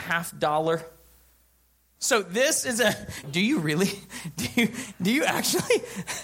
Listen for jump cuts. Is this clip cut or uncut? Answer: cut